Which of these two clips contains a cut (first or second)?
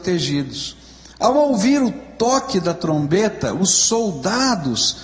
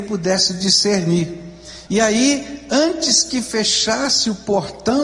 second